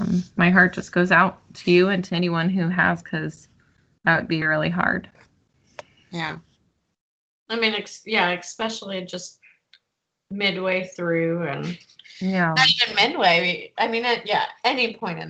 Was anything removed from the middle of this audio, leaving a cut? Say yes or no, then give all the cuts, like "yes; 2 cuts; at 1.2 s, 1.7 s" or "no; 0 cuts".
yes; 1 cut; at 4.4 s